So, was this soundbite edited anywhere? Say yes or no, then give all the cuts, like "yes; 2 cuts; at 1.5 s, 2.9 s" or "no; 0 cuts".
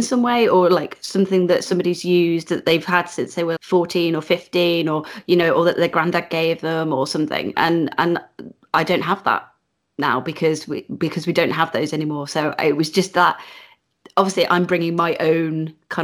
yes; 1 cut; at 3.6 s